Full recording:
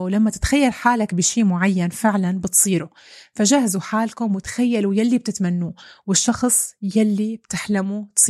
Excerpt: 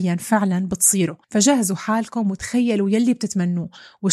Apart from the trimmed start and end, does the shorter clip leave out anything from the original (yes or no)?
yes